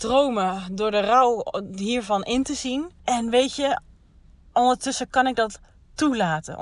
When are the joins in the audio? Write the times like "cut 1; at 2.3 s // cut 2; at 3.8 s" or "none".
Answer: cut 1; at 3.0 s